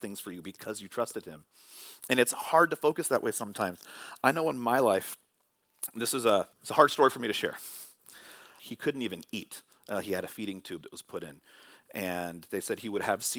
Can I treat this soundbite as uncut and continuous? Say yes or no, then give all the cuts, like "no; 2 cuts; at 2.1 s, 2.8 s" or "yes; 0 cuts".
no; 2 cuts; at 6.5 s, 8.6 s